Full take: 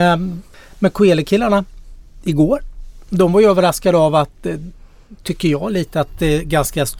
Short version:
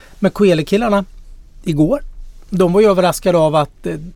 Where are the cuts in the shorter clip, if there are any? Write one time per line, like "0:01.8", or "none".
none